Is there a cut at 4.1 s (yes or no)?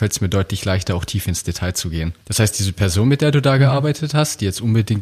no